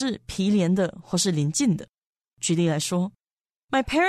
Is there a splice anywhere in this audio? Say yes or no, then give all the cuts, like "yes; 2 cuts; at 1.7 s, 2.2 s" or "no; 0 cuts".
no; 0 cuts